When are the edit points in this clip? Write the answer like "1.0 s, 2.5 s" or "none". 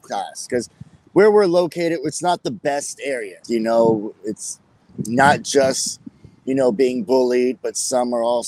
3.4 s